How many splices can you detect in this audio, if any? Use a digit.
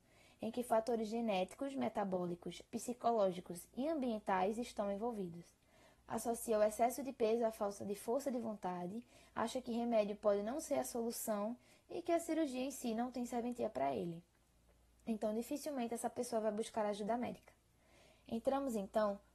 2